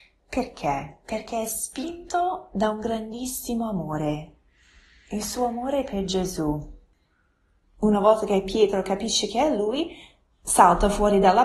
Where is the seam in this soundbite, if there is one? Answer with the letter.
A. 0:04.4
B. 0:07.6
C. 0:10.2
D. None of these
B